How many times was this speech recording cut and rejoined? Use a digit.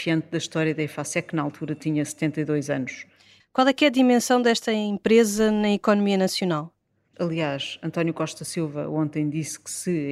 2